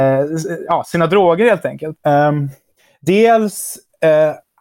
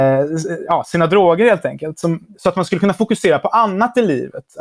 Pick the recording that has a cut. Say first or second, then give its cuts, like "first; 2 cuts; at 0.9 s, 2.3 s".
first; 1 cut; at 2.0 s